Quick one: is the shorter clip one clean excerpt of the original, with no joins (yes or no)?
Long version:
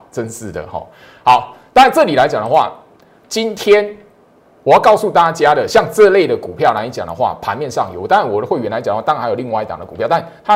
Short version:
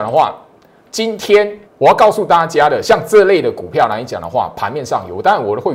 no